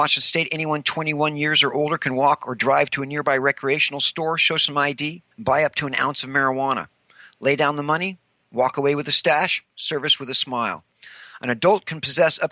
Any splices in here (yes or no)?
yes